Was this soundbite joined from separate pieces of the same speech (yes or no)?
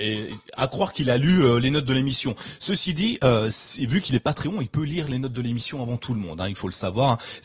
no